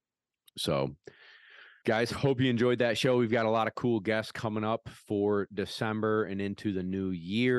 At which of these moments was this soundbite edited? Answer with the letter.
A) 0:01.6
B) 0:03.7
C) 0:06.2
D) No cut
D